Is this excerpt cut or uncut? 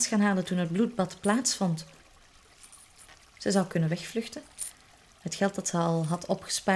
cut